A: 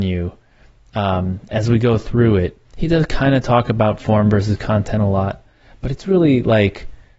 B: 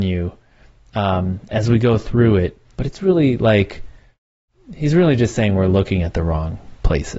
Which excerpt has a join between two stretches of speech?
B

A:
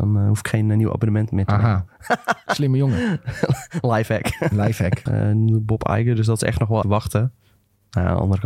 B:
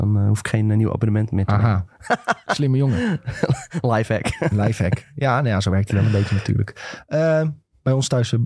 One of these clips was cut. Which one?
A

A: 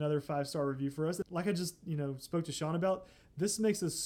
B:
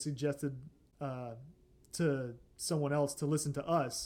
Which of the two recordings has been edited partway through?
A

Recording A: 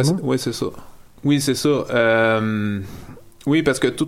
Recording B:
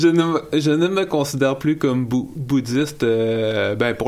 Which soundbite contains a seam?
A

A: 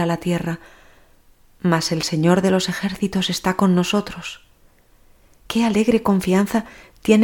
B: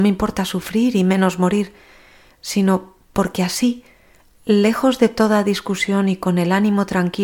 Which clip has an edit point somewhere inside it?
A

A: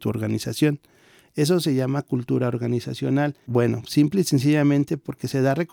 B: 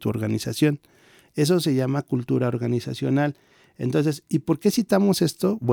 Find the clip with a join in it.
A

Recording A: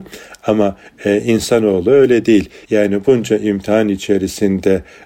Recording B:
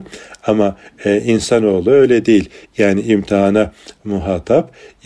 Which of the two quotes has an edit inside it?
A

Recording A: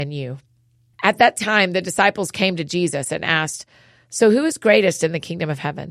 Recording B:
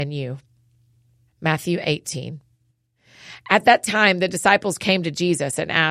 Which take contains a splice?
A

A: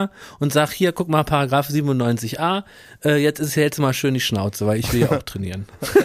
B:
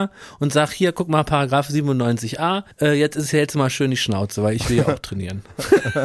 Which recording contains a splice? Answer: B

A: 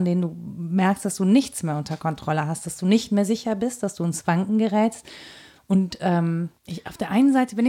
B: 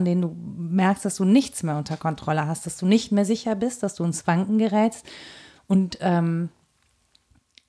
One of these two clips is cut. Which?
A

